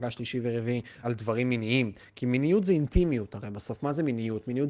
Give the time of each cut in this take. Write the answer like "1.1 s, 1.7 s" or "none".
1.0 s